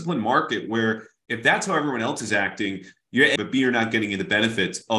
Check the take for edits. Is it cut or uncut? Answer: cut